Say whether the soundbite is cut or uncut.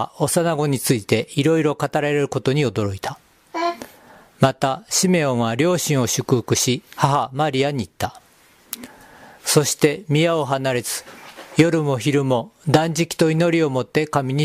cut